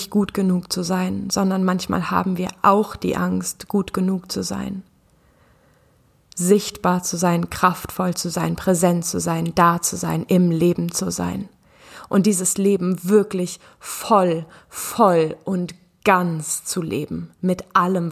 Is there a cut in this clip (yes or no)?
no